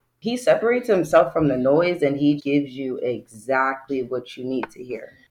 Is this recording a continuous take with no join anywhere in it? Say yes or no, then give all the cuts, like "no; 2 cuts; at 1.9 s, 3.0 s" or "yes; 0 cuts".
no; 1 cut; at 2.4 s